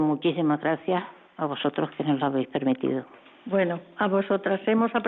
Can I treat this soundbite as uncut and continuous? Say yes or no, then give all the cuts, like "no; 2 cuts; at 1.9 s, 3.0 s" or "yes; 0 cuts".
yes; 0 cuts